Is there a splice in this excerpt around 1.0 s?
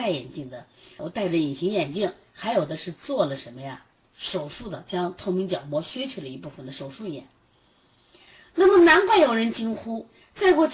yes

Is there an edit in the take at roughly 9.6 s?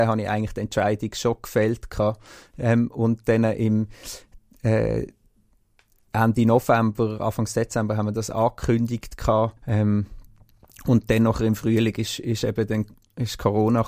yes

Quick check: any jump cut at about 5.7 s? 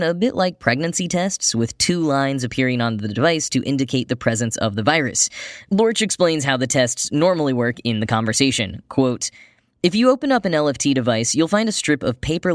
yes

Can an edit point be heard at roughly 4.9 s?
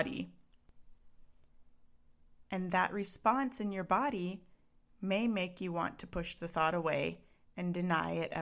no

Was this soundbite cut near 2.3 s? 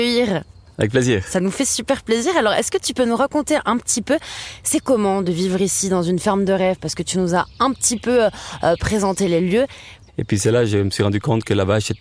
no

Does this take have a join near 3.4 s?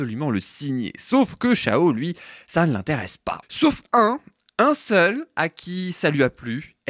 yes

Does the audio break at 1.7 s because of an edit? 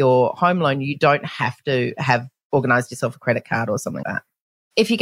no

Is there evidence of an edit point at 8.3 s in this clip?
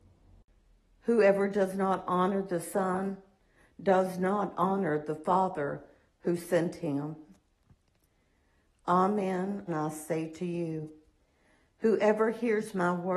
no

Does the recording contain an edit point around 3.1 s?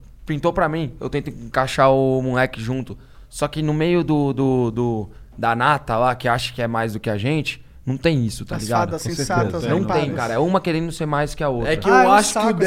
no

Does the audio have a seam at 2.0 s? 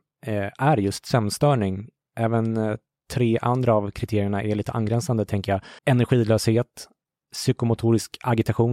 no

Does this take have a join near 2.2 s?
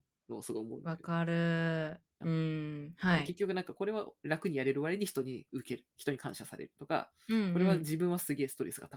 yes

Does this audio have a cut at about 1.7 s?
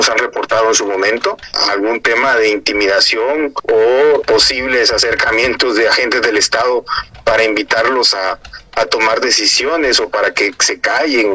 no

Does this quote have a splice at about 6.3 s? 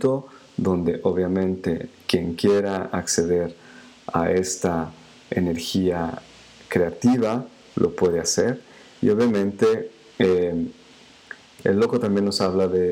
no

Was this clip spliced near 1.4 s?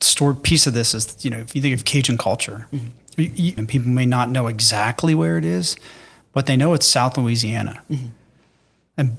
no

